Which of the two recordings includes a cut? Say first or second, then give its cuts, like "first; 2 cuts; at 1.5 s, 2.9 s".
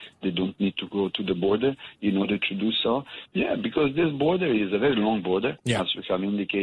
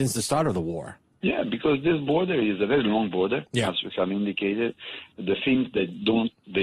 first; 1 cut; at 3.3 s